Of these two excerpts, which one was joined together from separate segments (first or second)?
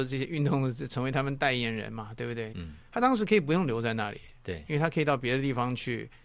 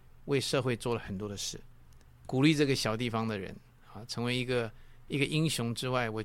first